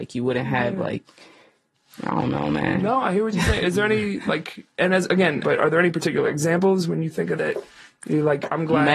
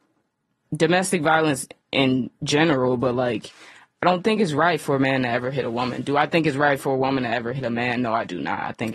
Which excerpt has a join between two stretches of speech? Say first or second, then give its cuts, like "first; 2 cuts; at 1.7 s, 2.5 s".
first; 2 cuts; at 5.4 s, 7.4 s